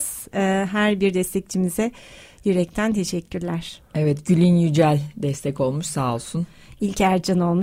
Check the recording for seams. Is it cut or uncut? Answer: uncut